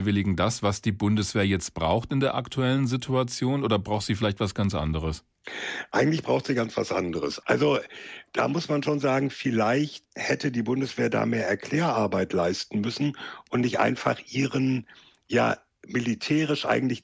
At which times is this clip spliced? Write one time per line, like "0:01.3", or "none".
0:07.4
0:10.1